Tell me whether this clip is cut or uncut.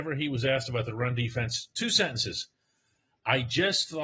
uncut